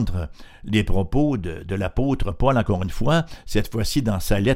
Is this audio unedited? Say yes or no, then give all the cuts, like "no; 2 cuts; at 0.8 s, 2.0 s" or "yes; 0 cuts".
yes; 0 cuts